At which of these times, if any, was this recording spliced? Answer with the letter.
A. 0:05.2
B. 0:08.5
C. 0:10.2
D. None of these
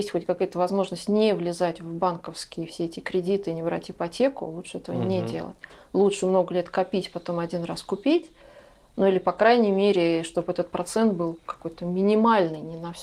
D